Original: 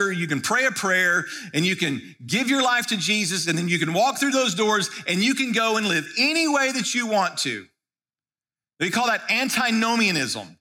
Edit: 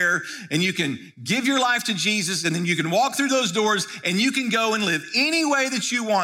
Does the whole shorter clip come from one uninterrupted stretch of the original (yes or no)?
yes